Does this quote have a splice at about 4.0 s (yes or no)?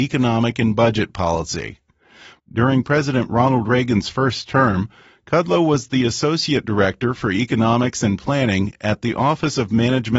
no